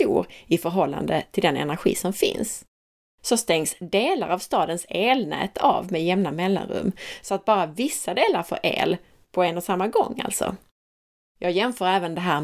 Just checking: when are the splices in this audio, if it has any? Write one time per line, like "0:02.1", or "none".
0:11.2